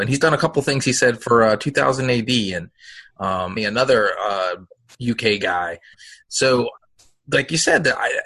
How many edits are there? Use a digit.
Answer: 2